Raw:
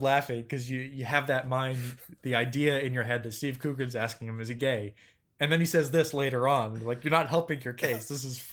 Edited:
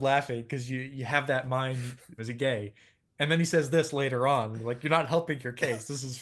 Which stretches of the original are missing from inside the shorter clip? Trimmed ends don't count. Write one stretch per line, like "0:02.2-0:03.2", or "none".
0:02.2-0:04.4